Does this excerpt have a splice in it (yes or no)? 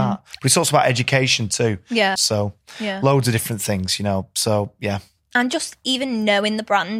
yes